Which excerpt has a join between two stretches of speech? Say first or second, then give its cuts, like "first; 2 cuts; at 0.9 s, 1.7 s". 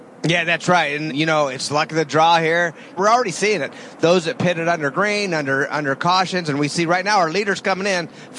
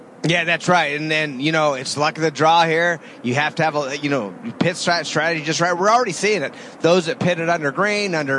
first; 2 cuts; at 1.1 s, 3.0 s